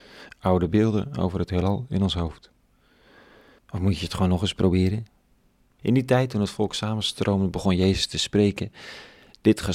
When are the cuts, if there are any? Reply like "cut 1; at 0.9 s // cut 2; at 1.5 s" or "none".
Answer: cut 1; at 3.6 s // cut 2; at 5.8 s